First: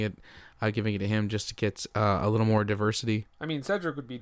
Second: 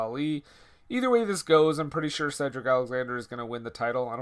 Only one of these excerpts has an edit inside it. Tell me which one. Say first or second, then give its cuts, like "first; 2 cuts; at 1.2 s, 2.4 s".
first; 1 cut; at 3.3 s